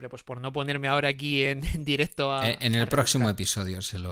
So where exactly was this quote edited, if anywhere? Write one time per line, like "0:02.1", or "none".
none

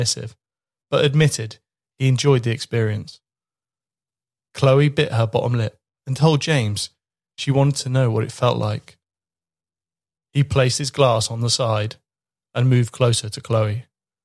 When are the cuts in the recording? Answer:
0:10.2

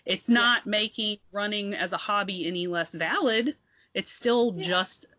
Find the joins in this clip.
none

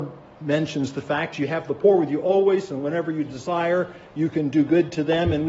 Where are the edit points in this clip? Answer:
none

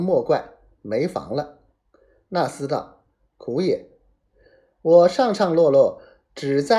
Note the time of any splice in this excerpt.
none

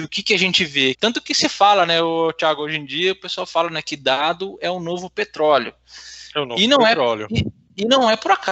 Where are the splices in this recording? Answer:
0:00.9

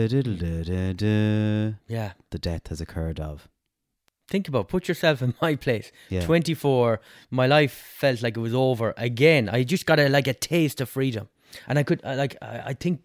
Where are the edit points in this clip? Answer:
none

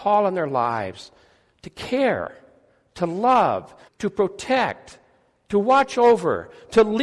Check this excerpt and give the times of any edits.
0:03.9

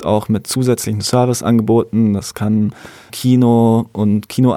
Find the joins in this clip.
0:03.1

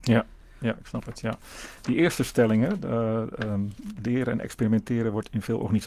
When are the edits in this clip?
none

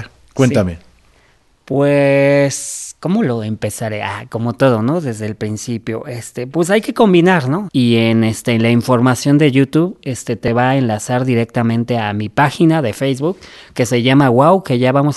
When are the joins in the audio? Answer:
0:07.7

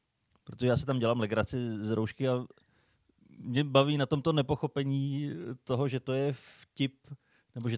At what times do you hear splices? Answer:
none

